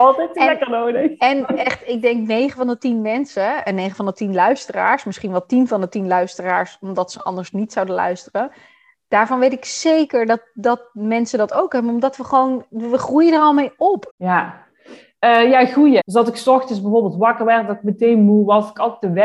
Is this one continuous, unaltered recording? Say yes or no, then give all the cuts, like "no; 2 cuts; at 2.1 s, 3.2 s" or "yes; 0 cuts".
no; 2 cuts; at 14.1 s, 16.0 s